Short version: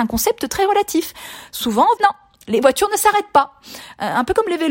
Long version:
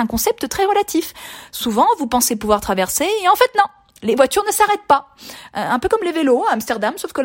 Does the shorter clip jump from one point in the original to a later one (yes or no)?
yes